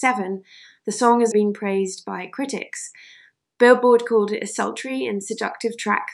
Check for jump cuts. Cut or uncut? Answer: cut